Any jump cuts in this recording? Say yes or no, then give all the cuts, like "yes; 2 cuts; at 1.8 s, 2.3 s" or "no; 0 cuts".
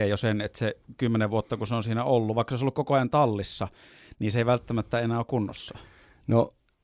no; 0 cuts